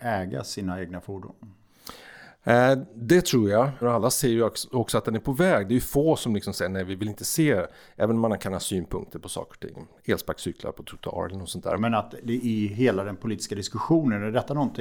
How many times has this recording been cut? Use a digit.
2